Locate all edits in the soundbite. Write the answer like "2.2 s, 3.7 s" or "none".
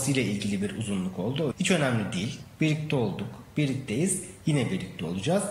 1.5 s